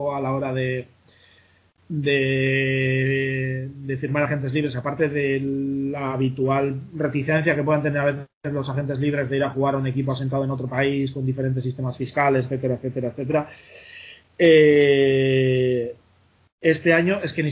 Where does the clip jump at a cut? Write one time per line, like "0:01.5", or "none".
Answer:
0:12.4